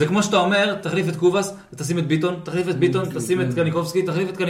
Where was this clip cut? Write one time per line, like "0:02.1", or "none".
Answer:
none